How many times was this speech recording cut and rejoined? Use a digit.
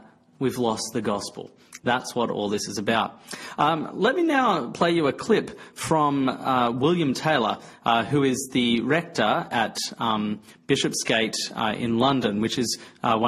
1